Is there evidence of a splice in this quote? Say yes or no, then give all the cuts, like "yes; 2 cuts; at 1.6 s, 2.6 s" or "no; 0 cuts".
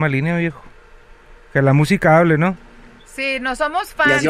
no; 0 cuts